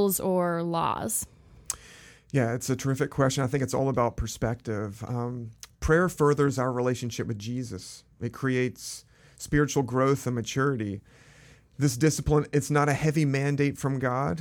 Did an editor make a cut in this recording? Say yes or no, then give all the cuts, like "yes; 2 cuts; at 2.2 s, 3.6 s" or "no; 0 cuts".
no; 0 cuts